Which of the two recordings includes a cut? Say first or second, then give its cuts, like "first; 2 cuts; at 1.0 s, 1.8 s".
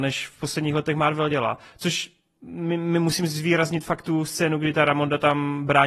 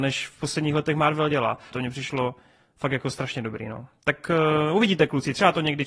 second; 1 cut; at 1.7 s